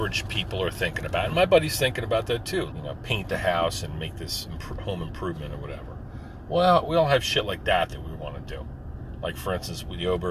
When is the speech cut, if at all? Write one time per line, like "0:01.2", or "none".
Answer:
0:02.7